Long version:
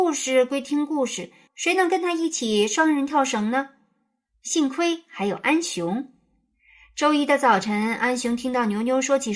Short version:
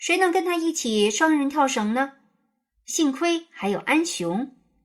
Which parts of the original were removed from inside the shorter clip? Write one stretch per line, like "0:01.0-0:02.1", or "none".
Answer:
none